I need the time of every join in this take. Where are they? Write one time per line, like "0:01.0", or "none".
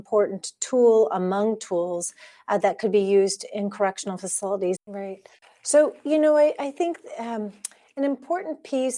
0:04.8

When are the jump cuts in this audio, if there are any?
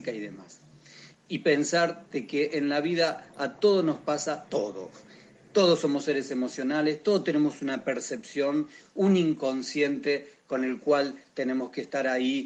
0:01.1

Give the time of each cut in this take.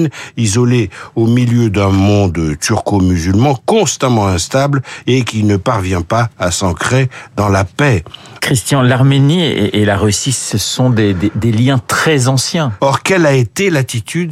0:08.4
0:12.8

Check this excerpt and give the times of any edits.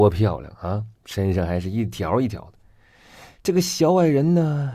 0:01.0

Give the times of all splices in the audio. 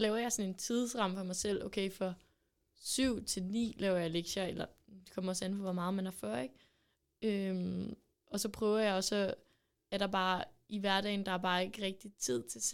none

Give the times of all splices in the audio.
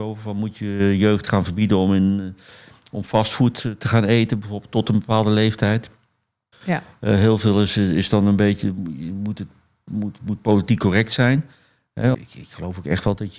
0:06.5
0:12.1

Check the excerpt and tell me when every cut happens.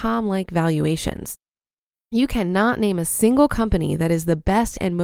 0:01.9

